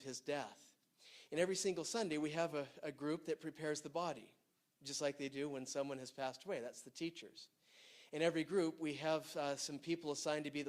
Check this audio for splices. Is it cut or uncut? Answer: uncut